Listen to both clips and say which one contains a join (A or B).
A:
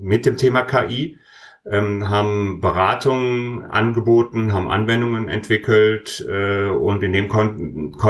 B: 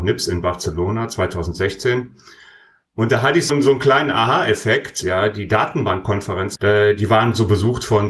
B